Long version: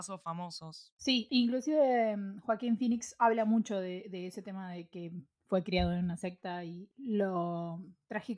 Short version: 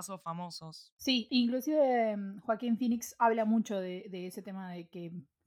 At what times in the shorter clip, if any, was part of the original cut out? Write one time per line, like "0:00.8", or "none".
none